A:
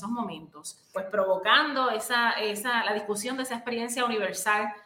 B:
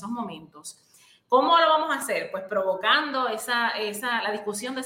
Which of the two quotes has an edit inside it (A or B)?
A